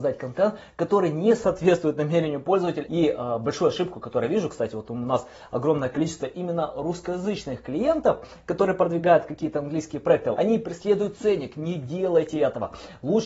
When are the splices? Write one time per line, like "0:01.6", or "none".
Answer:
0:02.8
0:10.3